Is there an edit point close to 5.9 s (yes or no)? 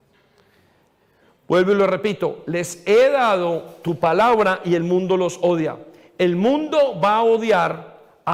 no